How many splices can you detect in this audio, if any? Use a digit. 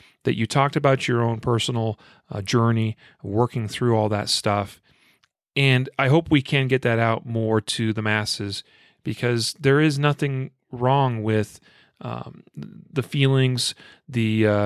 0